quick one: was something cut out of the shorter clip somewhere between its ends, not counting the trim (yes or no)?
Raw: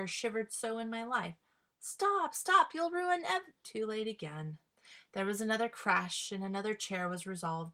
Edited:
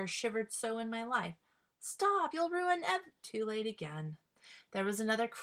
yes